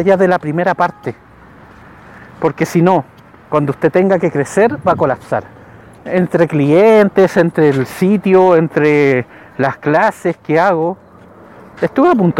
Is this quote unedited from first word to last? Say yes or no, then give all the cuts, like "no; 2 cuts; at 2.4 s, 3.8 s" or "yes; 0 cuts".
no; 1 cut; at 6.0 s